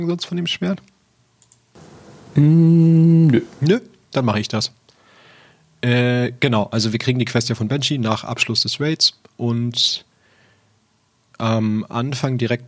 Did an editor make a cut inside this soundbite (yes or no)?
no